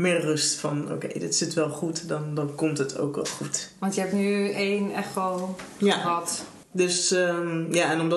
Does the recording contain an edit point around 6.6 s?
yes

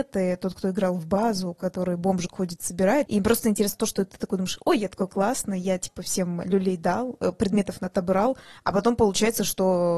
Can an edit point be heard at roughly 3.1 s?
yes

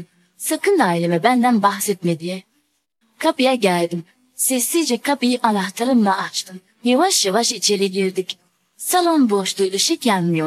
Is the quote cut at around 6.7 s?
no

